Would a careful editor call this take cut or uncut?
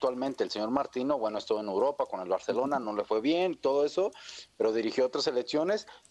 uncut